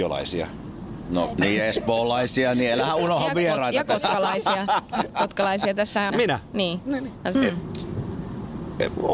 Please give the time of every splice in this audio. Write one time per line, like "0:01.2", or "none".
0:01.3
0:06.1
0:07.3